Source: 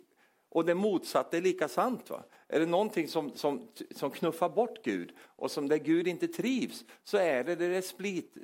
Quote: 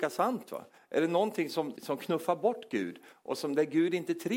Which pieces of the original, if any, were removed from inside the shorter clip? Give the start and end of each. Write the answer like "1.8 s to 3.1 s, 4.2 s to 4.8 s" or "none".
3.3 s to 3.9 s